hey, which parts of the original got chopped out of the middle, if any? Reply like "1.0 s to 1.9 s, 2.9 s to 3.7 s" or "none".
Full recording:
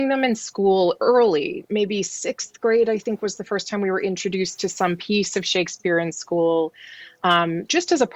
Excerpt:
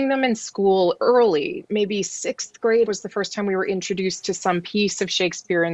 2.9 s to 3.2 s